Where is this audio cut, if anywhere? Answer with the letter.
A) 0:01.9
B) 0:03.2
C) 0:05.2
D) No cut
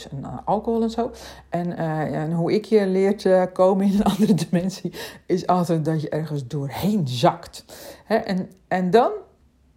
D